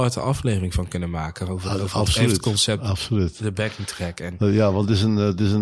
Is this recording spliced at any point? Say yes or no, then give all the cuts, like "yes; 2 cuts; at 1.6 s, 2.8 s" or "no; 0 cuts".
no; 0 cuts